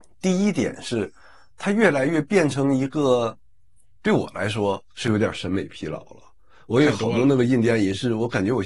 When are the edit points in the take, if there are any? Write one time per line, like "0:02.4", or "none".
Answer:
0:04.0

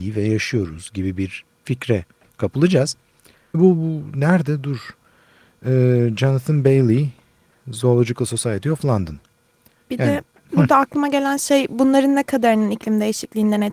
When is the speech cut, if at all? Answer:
0:03.5

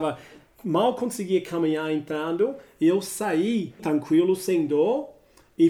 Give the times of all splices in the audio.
0:03.8

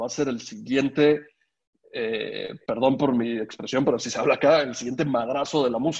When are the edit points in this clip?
none

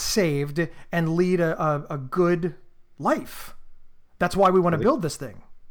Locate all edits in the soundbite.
none

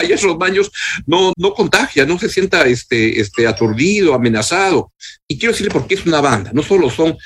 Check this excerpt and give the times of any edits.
0:01.3
0:05.2

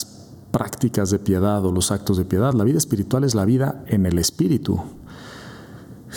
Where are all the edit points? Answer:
none

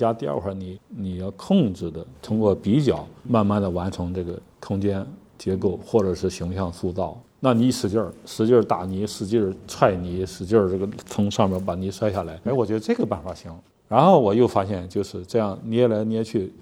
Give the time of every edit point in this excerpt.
0:12.5

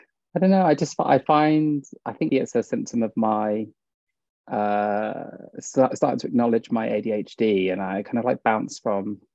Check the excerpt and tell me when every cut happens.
0:02.3

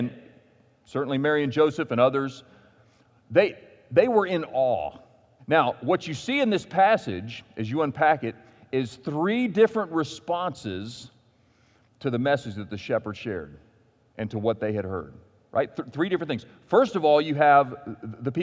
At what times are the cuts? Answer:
0:05.4

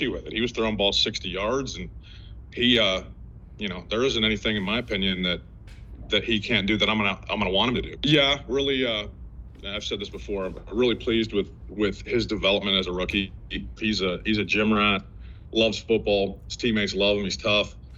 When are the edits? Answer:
0:08.0
0:13.8

